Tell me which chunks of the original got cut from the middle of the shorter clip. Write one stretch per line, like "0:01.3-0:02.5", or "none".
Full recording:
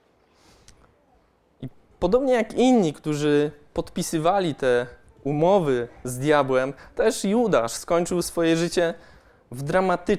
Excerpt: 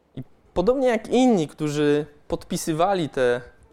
none